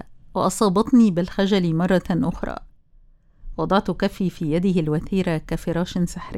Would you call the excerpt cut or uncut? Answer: uncut